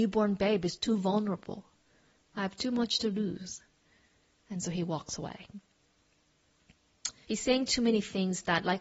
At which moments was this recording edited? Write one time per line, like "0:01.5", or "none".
0:07.2